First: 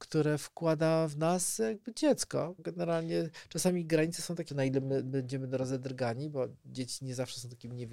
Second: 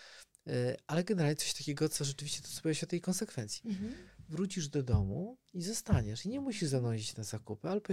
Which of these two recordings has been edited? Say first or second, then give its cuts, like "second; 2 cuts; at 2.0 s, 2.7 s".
first; 2 cuts; at 2.6 s, 4.5 s